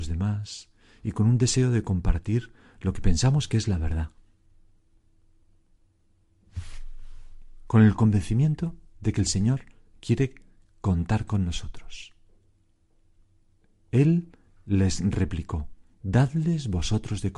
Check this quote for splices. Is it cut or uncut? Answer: uncut